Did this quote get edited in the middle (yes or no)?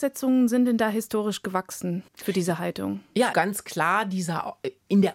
yes